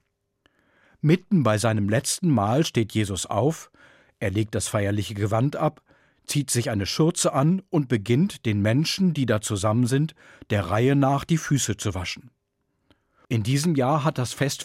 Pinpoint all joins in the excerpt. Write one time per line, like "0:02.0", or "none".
0:13.2